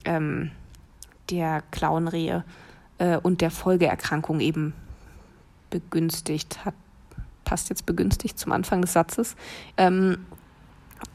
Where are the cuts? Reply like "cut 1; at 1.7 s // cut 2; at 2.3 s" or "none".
cut 1; at 9.8 s